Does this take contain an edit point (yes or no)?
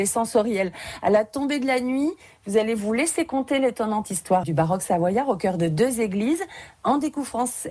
yes